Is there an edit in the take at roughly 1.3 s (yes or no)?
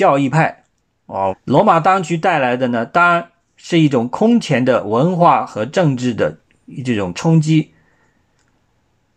yes